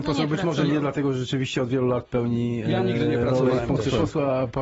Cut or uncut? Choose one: cut